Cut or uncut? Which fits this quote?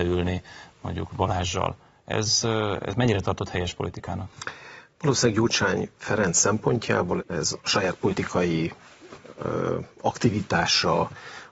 cut